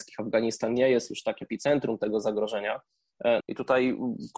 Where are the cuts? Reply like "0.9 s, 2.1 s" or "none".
1.4 s, 3.4 s

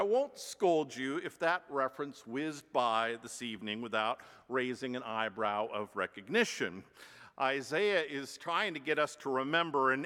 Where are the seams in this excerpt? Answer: none

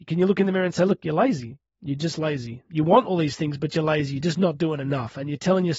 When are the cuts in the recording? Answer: none

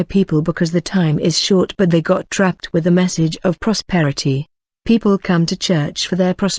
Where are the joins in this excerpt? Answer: 4.7 s

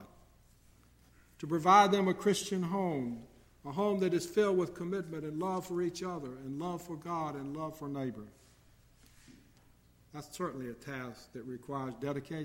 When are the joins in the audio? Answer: none

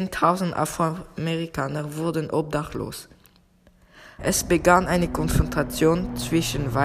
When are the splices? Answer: 4.2 s

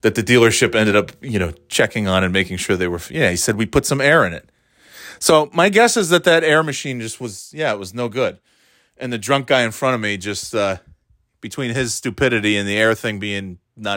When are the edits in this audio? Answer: none

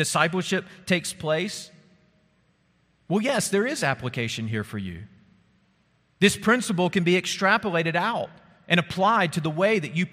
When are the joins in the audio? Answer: none

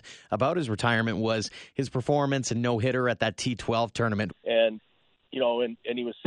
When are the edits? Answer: 4.3 s

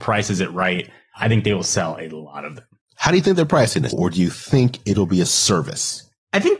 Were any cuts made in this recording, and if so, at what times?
3.9 s

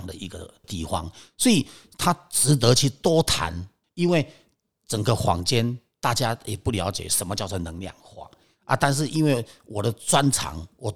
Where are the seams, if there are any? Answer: 3.8 s

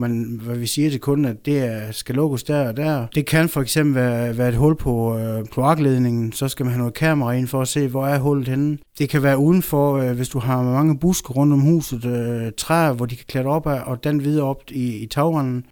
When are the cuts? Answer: none

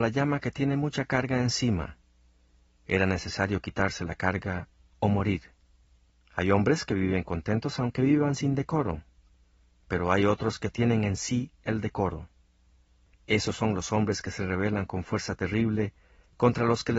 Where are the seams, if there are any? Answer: none

